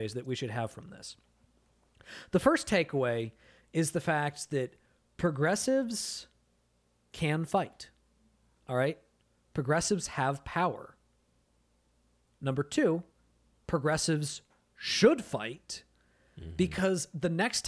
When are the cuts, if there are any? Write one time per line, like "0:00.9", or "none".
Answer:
0:12.3